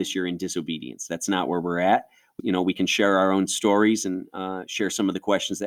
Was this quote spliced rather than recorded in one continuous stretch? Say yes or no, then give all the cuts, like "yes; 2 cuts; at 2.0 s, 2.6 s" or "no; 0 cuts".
yes; 1 cut; at 2.4 s